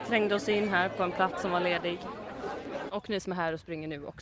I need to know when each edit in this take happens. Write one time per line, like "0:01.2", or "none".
0:02.9